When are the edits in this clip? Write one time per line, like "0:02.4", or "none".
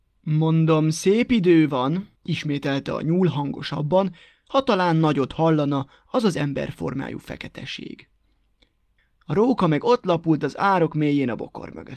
0:02.2
0:09.0